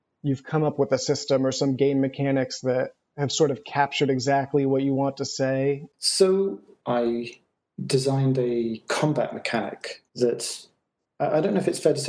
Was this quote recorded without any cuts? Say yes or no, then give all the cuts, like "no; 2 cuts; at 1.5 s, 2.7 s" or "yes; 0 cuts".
no; 2 cuts; at 6.8 s, 10.1 s